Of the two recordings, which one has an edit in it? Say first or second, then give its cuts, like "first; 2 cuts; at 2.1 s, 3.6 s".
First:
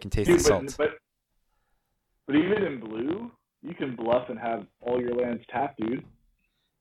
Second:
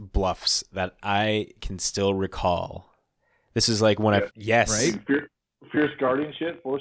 second; 1 cut; at 4.3 s